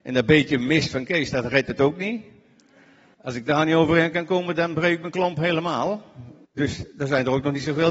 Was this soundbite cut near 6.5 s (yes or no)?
yes